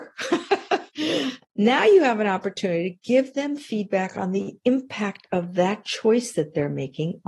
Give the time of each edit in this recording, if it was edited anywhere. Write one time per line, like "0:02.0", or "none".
none

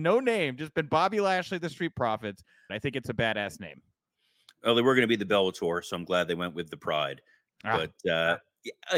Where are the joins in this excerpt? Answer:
0:02.7

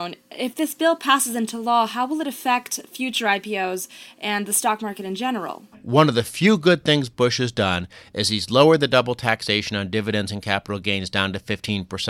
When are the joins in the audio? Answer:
0:05.7

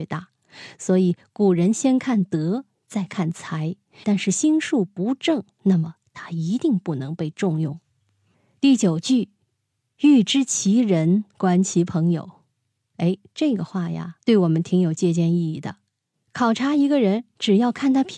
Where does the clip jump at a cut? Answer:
0:04.0

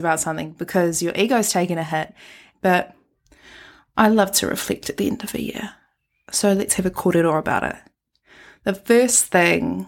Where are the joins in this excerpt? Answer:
0:02.5

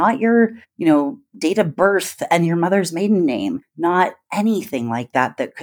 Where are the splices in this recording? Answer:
none

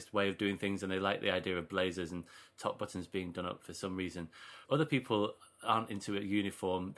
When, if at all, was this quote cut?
0:04.6

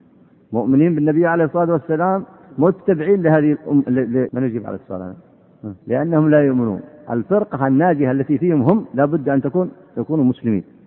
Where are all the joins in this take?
0:04.3
0:05.8

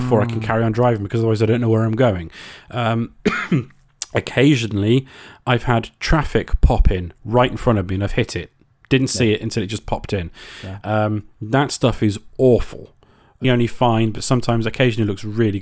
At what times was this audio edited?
0:13.4

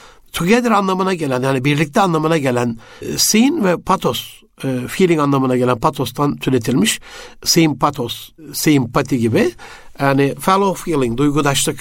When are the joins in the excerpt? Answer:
none

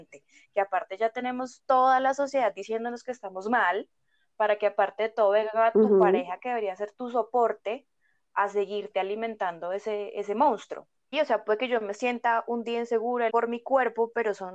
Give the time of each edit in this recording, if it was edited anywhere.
0:11.1
0:13.3

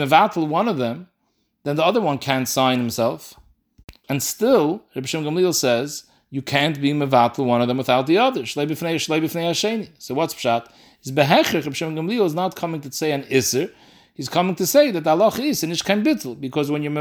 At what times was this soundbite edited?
0:04.0

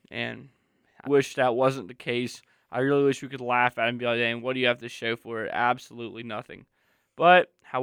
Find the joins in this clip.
0:01.1

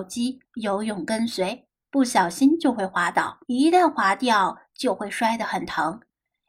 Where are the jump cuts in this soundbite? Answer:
0:01.9
0:03.4

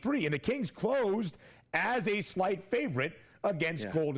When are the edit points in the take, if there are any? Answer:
none

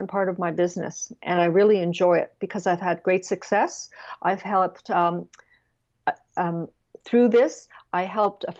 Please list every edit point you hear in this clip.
none

